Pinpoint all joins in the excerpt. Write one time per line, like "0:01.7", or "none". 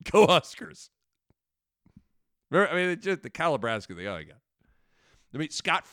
none